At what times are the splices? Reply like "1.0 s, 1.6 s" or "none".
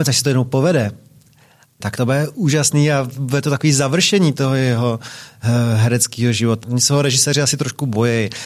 1.8 s, 6.6 s